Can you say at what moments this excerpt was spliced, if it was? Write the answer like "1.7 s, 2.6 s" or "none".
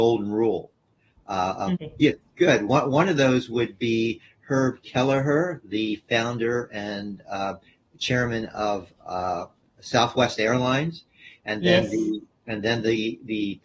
1.7 s